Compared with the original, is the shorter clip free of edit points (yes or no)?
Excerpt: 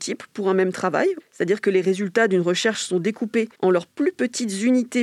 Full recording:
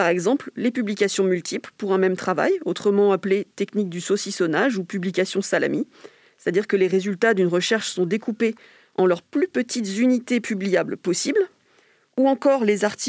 no